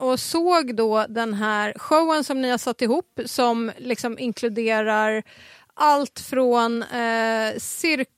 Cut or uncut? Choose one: uncut